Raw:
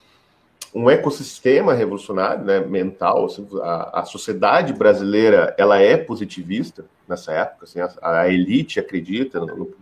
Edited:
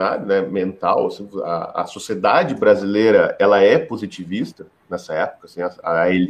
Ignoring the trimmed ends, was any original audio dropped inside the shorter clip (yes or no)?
no